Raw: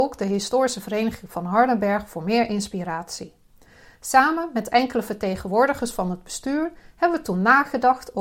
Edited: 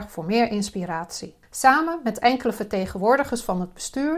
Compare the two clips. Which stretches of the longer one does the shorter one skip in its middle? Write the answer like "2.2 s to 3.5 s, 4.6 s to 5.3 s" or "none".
3.4 s to 3.9 s